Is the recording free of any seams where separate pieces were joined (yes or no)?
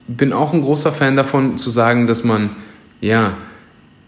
yes